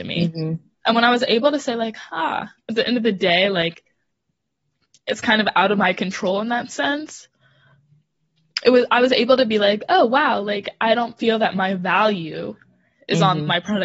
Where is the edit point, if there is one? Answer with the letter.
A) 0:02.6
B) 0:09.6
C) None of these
A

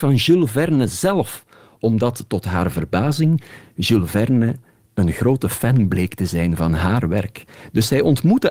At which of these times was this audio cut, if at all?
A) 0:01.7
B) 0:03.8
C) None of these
C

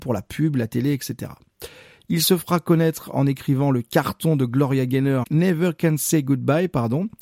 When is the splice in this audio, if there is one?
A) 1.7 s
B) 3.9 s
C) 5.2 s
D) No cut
C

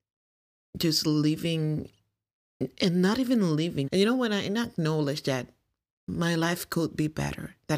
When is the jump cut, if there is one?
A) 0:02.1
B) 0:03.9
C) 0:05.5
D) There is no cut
B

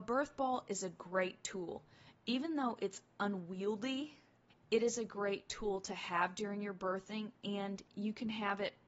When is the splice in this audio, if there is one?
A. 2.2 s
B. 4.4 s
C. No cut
C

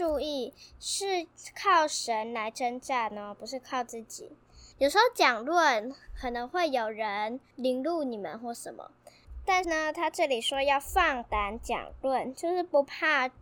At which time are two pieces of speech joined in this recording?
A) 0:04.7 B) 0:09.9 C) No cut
A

